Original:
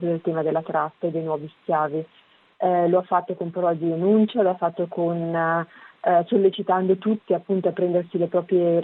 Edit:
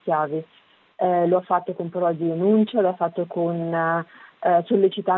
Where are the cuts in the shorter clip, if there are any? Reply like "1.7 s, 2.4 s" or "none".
none